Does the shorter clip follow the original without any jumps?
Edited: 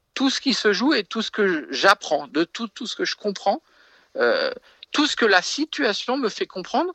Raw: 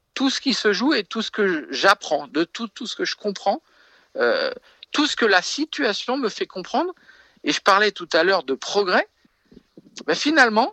yes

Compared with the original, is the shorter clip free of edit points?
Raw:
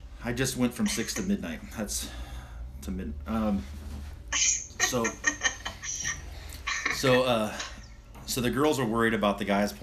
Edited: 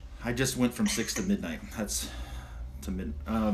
yes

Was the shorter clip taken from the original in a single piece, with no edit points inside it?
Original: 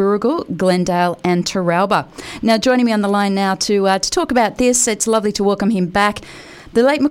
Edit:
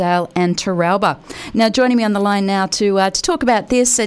yes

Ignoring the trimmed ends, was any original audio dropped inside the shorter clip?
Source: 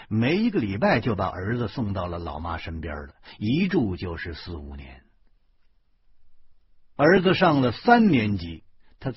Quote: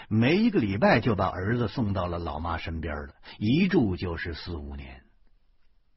no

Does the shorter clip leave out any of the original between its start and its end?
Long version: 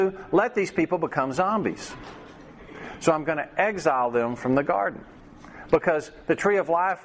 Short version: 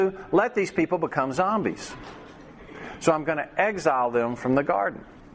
no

